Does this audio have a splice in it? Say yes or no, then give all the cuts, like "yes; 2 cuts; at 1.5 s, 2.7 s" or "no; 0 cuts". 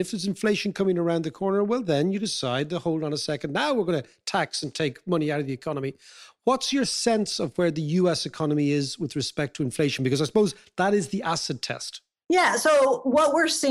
no; 0 cuts